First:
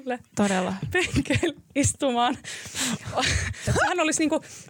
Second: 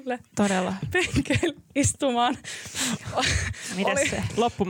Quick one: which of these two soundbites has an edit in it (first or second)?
first